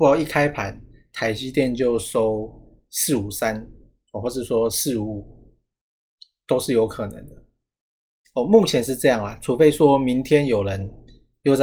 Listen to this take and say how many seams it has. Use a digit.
1